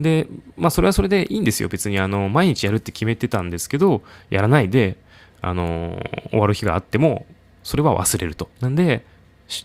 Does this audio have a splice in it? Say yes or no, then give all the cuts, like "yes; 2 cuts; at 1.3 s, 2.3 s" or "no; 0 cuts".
yes; 1 cut; at 8.5 s